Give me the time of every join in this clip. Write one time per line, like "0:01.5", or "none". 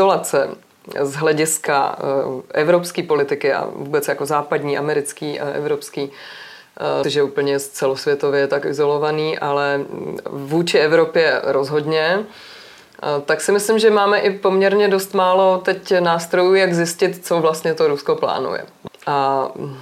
0:07.0
0:18.9

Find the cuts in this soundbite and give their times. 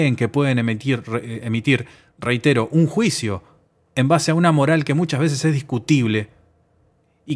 none

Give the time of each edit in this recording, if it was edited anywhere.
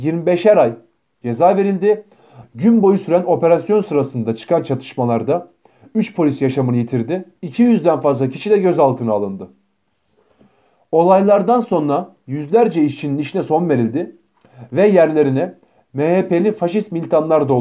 0:02.4
0:07.4

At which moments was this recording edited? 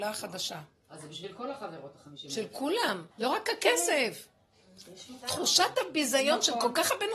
0:03.1

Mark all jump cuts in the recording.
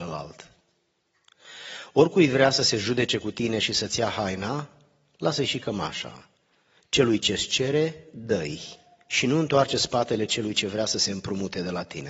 0:06.8

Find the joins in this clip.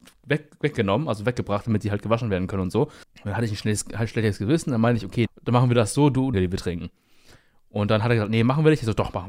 0:03.0
0:05.3
0:06.3

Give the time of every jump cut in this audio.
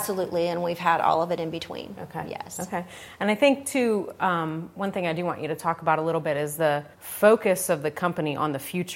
0:06.9

